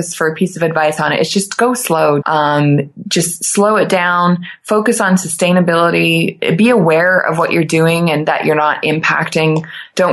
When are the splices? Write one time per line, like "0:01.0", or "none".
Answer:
0:02.2